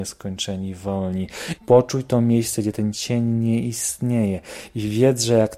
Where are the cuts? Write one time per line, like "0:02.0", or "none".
0:01.6

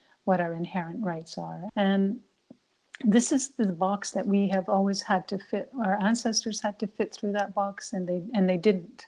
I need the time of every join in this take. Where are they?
0:01.7

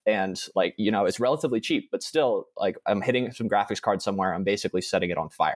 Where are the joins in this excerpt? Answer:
none

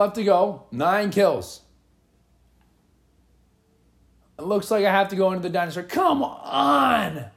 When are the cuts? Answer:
0:04.4

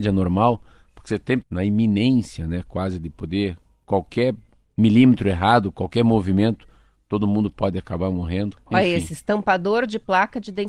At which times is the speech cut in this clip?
0:01.4

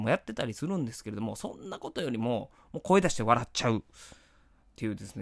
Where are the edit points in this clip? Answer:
none

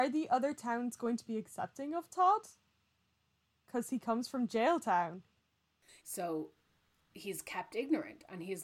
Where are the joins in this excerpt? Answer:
0:06.0

